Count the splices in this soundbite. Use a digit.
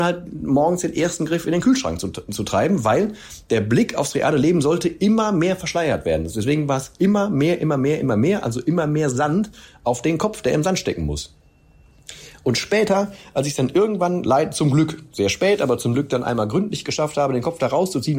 0